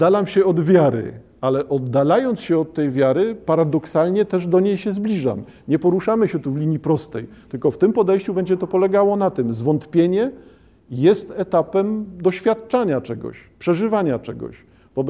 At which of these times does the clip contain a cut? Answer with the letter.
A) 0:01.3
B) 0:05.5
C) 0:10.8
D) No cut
D